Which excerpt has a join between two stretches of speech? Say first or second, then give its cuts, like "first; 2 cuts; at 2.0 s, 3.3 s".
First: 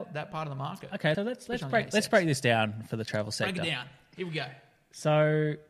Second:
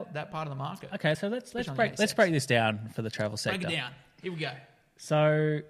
first; 1 cut; at 1.1 s